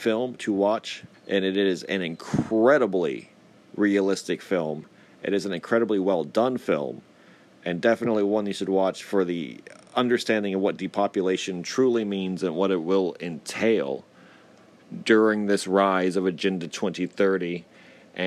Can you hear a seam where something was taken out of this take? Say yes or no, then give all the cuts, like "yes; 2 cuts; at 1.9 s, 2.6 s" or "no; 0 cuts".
yes; 1 cut; at 1.1 s